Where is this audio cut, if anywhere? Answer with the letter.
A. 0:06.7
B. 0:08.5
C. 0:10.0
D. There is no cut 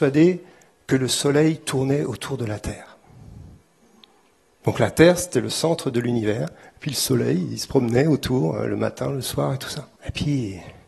C